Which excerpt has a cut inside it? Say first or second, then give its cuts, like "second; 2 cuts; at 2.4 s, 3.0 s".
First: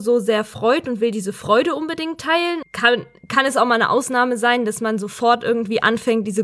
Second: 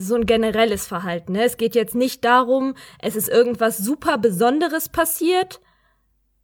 first; 1 cut; at 2.6 s